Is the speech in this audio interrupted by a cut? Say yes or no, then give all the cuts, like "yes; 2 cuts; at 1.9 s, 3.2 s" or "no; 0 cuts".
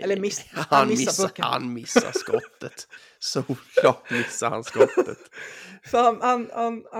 no; 0 cuts